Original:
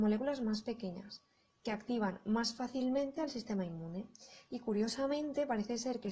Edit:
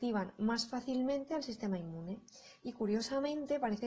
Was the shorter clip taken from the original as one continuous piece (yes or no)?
yes